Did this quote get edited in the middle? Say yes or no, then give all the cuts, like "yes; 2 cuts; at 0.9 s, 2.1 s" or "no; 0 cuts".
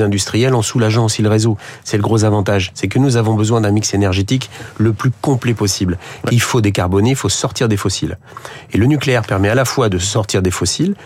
yes; 1 cut; at 6.3 s